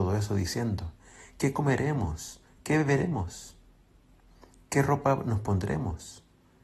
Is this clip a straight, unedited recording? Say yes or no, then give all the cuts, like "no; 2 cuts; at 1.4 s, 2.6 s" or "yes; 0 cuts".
yes; 0 cuts